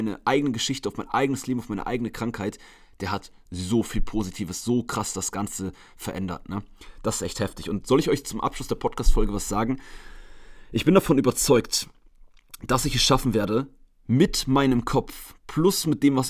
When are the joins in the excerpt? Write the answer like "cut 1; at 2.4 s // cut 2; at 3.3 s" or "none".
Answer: none